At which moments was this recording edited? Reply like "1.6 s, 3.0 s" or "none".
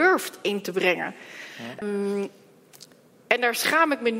1.8 s